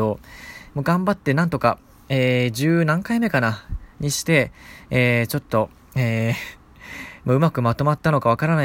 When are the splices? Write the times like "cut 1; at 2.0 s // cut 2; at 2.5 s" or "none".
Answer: none